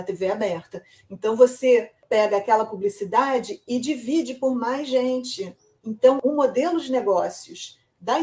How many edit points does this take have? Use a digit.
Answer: 0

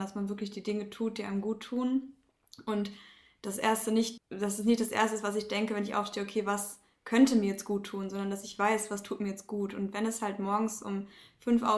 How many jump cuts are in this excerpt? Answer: 1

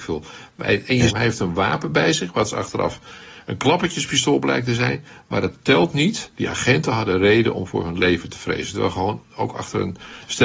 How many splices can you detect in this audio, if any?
2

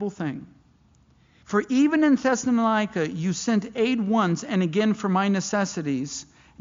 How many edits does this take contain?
1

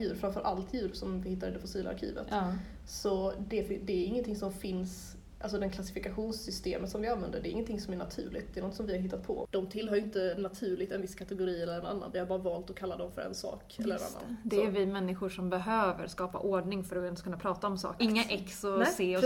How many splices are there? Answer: 1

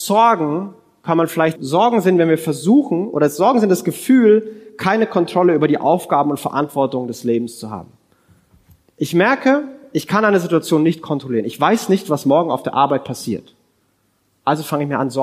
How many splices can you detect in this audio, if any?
1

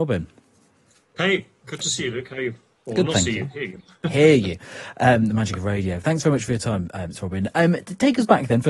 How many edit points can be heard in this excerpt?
0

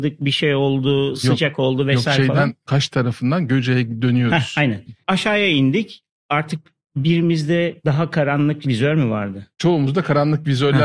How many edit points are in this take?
0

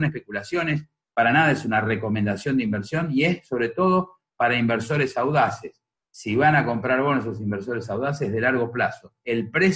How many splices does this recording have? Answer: 0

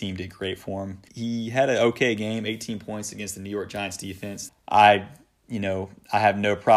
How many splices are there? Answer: 2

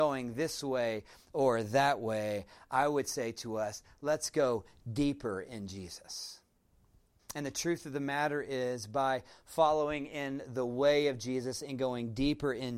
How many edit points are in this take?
1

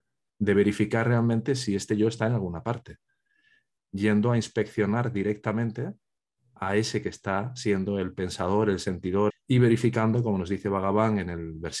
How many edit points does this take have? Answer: 1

